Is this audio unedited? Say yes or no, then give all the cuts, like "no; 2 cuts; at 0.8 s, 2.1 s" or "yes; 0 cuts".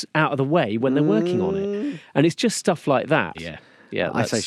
no; 1 cut; at 3.3 s